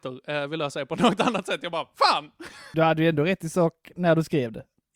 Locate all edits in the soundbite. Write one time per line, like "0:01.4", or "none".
0:02.7